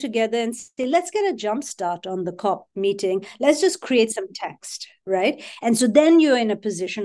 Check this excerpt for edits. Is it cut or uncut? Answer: uncut